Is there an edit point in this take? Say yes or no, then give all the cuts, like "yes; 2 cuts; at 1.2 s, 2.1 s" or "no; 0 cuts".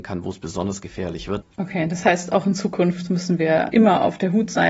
yes; 2 cuts; at 1.4 s, 3.7 s